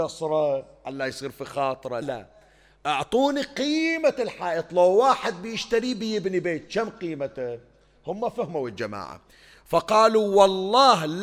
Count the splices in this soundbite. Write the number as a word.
one